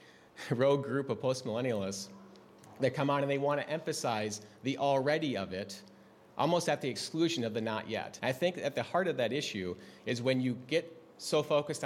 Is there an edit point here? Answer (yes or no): yes